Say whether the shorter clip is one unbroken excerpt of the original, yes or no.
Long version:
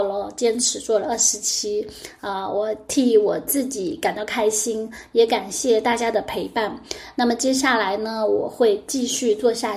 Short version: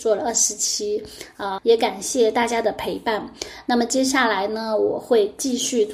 no